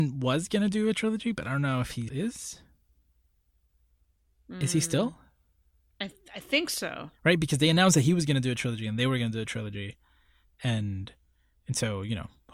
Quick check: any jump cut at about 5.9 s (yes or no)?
no